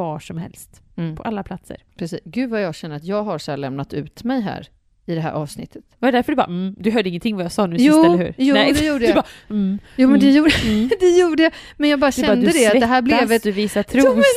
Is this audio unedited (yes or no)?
yes